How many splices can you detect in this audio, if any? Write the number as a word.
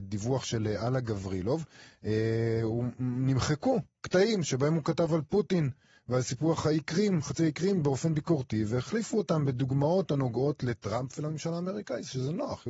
zero